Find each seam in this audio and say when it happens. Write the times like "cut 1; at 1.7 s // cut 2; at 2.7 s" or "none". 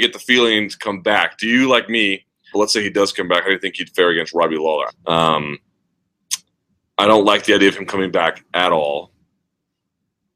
cut 1; at 2.5 s // cut 2; at 4.9 s